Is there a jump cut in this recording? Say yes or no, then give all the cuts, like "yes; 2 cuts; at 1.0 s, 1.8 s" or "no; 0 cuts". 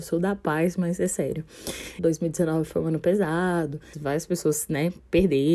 yes; 2 cuts; at 2.0 s, 3.9 s